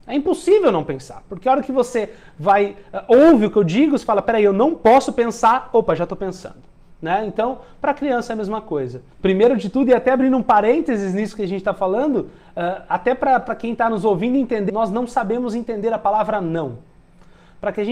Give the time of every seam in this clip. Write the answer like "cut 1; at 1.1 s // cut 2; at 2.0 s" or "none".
cut 1; at 9.1 s // cut 2; at 14.7 s